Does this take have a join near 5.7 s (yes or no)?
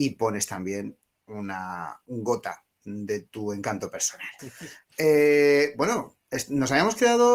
no